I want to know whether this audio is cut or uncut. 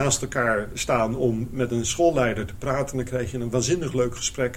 uncut